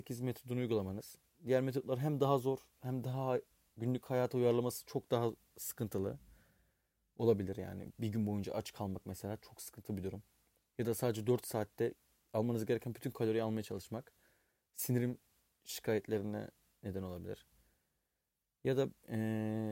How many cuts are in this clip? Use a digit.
0